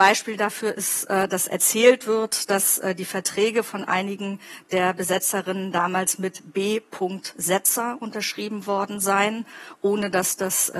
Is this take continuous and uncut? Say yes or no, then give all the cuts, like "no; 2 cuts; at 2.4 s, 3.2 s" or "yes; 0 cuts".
yes; 0 cuts